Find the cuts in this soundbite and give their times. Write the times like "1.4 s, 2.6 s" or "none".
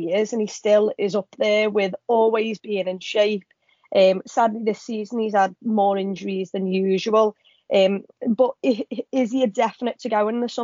none